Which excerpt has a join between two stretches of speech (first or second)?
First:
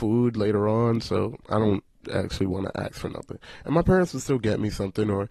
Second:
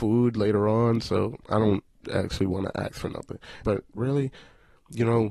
second